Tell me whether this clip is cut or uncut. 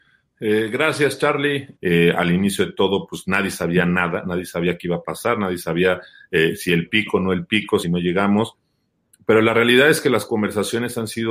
cut